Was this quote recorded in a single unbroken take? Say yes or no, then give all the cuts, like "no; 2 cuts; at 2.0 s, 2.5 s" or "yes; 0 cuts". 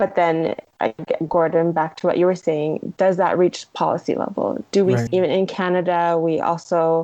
no; 1 cut; at 5.1 s